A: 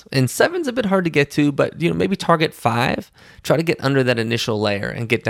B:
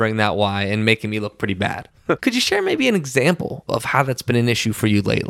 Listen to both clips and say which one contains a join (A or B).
B